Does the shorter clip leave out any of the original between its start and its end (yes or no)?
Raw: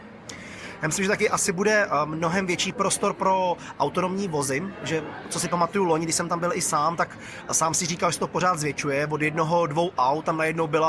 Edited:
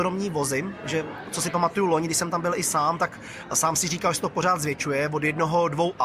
no